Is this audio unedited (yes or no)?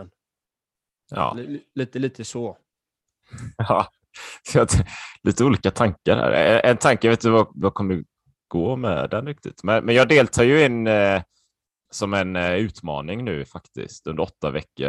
yes